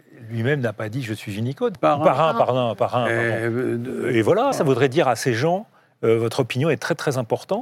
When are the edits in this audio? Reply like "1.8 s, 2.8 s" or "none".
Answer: 1.8 s, 4.5 s